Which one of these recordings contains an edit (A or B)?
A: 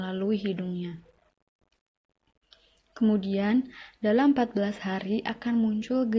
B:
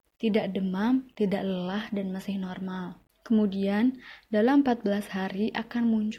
B